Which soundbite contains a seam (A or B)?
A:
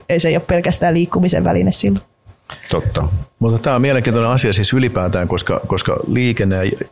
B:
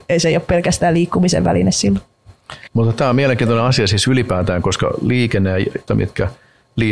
B